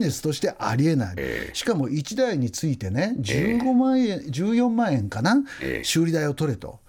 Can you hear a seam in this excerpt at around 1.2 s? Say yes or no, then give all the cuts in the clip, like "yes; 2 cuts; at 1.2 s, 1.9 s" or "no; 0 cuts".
yes; 1 cut; at 1.2 s